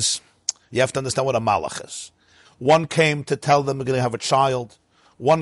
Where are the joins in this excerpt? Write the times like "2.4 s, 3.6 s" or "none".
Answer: 2.5 s